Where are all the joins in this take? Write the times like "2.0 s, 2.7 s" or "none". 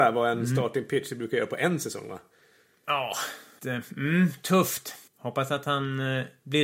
3.6 s, 5.1 s

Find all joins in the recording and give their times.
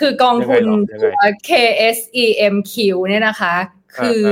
1.4 s

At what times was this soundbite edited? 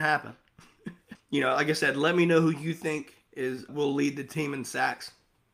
1.2 s, 3.7 s

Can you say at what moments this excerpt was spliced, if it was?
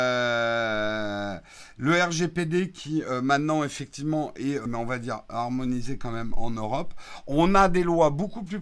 4.7 s

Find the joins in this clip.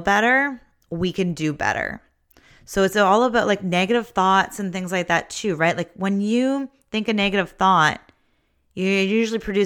none

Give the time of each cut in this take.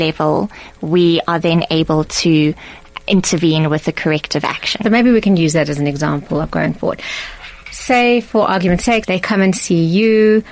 4.8 s, 9.0 s

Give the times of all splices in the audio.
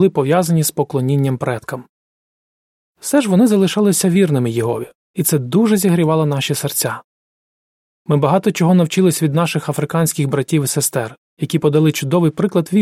none

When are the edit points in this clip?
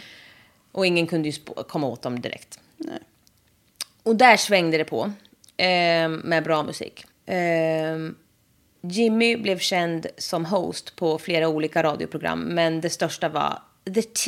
7.1 s, 8.8 s

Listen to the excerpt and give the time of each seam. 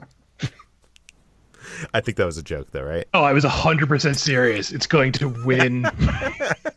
3.1 s

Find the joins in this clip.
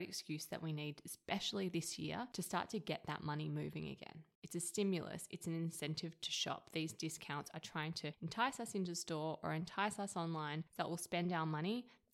4.4 s

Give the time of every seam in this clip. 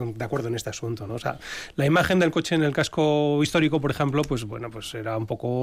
none

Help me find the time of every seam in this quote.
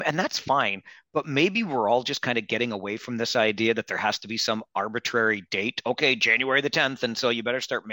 none

